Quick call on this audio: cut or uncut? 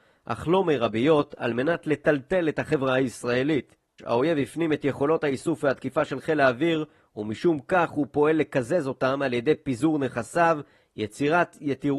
cut